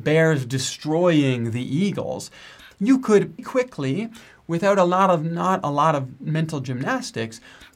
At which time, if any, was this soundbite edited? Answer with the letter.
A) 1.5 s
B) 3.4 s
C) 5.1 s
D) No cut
B